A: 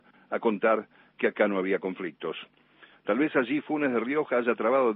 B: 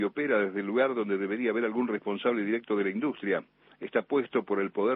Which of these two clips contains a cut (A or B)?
A